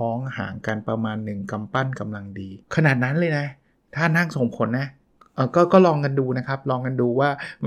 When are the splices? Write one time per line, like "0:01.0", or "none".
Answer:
0:02.6